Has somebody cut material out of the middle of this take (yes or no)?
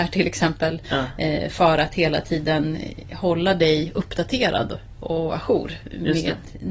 no